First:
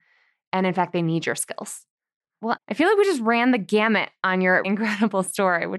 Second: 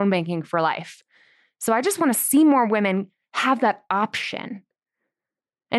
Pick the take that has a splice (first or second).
first